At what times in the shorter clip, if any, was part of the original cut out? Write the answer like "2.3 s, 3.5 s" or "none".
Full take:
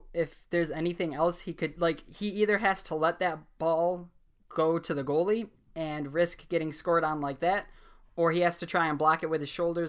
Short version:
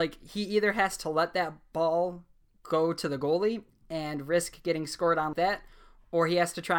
5.3 s

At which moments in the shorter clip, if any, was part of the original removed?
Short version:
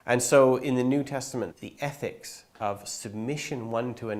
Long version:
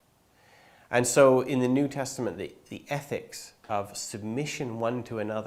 1.5 s

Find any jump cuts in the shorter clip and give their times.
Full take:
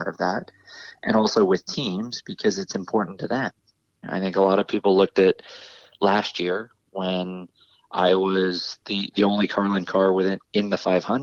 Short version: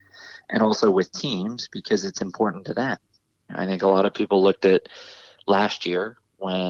none

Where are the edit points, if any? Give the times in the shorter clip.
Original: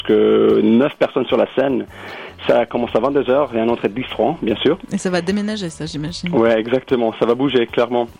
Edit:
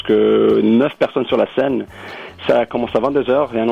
none

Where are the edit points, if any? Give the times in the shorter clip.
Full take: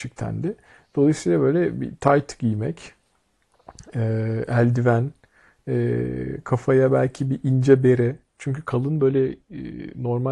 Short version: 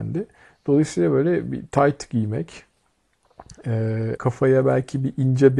4.2 s

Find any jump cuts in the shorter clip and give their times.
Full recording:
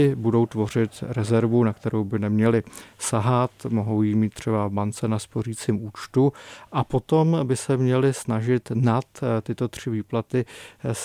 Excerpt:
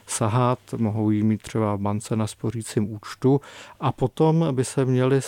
none

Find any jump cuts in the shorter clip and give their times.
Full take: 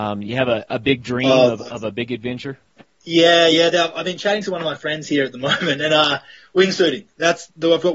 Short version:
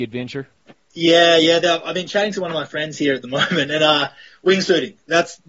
none

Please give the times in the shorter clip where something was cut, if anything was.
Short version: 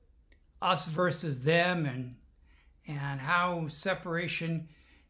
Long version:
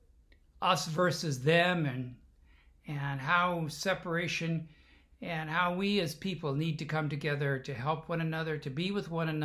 none

